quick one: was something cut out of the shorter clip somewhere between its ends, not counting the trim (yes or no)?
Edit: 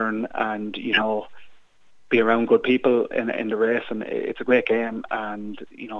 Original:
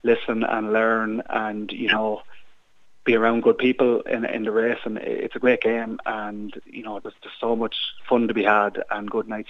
no